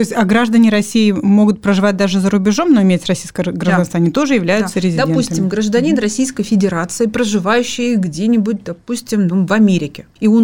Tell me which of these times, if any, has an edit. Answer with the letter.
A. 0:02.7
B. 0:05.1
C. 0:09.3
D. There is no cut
D